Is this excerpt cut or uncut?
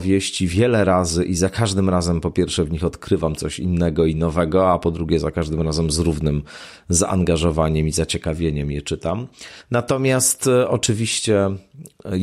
uncut